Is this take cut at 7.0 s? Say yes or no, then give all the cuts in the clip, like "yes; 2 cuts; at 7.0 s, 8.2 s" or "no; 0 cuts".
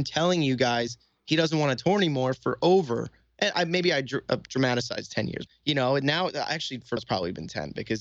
yes; 2 cuts; at 5.5 s, 7.0 s